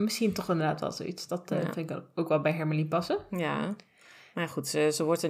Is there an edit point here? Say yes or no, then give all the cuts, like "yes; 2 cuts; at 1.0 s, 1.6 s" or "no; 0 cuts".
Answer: no; 0 cuts